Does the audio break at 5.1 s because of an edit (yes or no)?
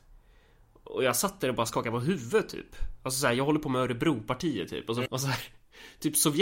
yes